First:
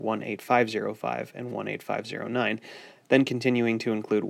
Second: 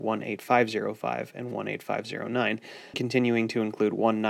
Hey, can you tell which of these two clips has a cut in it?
second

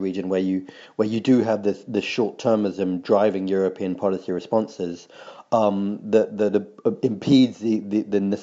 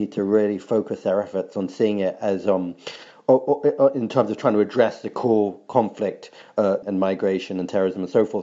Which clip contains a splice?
second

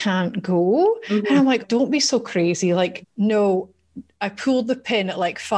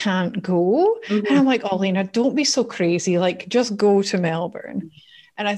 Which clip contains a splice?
first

